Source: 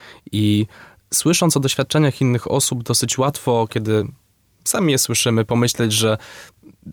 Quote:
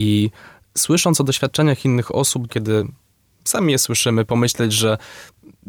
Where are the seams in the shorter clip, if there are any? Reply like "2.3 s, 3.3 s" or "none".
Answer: 2.5 s

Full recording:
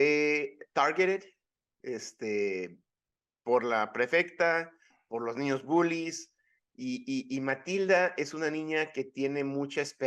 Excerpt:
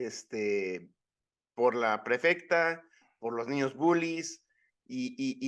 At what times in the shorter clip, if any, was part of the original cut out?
none

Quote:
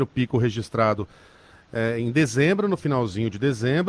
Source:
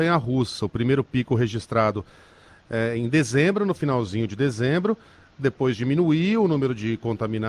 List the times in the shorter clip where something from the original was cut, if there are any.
none

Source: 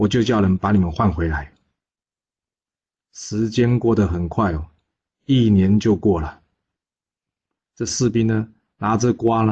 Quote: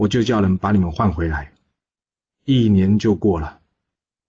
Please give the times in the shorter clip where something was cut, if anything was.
2.3 s

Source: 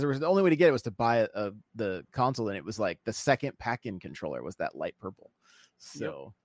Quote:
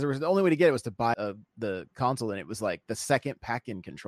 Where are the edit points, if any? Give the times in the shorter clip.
1.1 s

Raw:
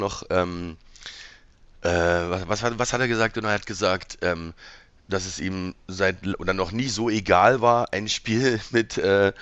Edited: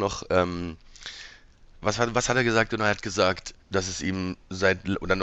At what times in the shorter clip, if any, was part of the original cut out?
1.8 s, 3.5 s

